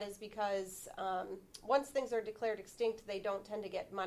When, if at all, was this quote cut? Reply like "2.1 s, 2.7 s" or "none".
none